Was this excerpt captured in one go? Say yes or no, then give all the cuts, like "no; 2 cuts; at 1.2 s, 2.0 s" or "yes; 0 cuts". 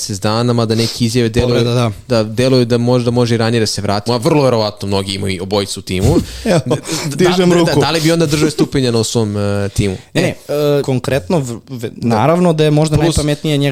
no; 2 cuts; at 4.1 s, 10.8 s